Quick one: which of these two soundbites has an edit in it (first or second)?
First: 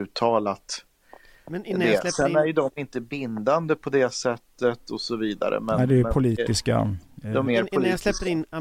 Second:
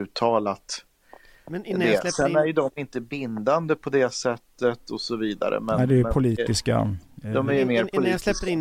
first